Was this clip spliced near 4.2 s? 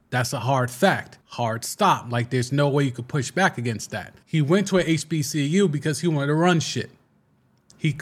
yes; 2 cuts; at 1.2 s, 4.2 s

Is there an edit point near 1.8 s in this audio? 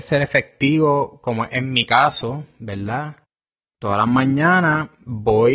no; 1 cut; at 3.7 s

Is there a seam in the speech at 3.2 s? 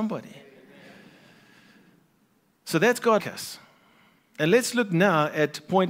yes; 1 cut; at 3.2 s

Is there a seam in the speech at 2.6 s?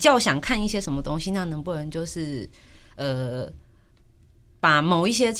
no; 0 cuts

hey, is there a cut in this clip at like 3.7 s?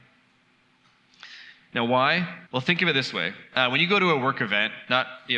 no; 1 cut; at 2.5 s

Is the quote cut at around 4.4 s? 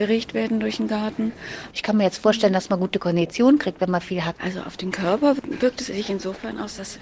yes; 2 cuts; at 1.7 s, 4.4 s

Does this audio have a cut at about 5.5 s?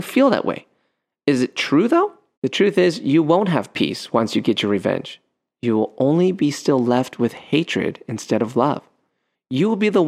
no; 1 cut; at 2.3 s

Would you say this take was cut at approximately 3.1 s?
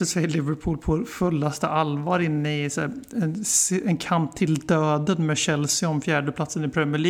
no; 0 cuts

